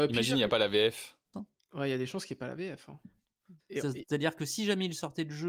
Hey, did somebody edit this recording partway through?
yes; 2 cuts; at 1.3 s, 3.6 s

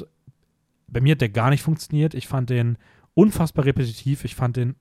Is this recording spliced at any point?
no; 0 cuts

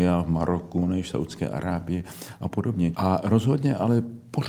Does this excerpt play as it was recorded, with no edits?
no; 1 cut; at 2.9 s

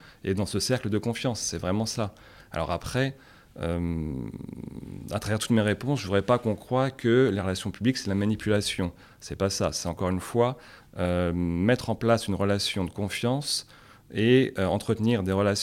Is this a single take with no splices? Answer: yes; 0 cuts

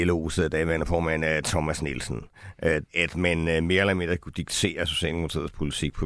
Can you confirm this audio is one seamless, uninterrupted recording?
no; 1 cut; at 2.9 s

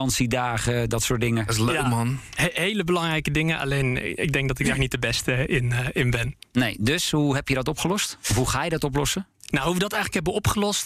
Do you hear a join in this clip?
no; 0 cuts

